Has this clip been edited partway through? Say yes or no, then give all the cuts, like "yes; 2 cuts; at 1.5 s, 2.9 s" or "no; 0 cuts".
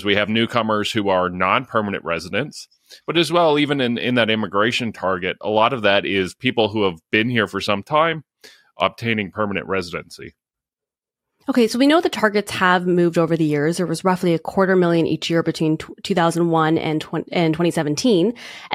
no; 0 cuts